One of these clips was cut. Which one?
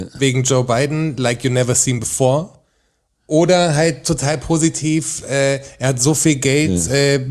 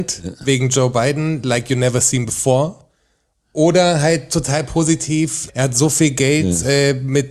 second; 1 cut; at 5.5 s

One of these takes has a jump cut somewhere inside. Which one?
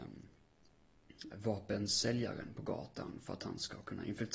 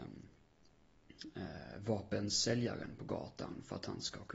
first; 1 cut; at 1.3 s

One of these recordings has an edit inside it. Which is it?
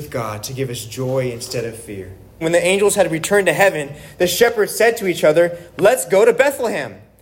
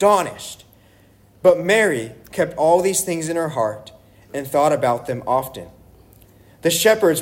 first; 1 cut; at 2.4 s

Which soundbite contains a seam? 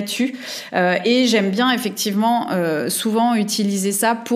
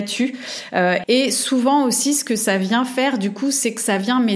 second; 1 cut; at 1.0 s

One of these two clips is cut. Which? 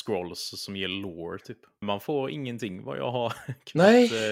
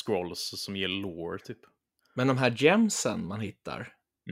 first; 1 cut; at 1.8 s

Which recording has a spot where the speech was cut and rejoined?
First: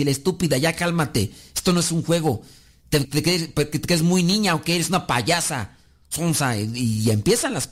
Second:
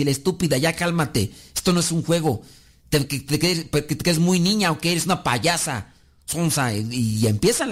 first; 1 cut; at 3.0 s

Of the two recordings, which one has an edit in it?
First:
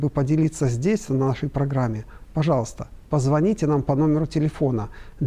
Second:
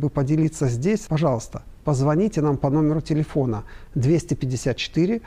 second; 1 cut; at 1.1 s

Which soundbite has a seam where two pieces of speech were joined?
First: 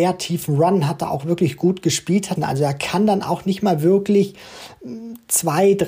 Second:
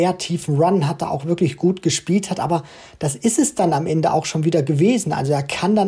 first; 1 cut; at 2.4 s

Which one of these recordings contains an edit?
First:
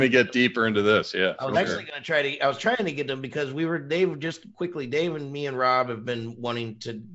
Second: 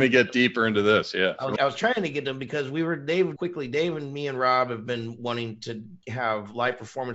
second; 2 cuts; at 1.6 s, 3.4 s

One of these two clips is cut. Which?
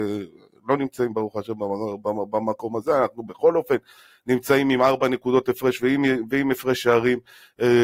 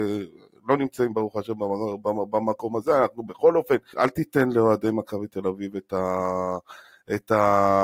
second; 1 cut; at 3.9 s

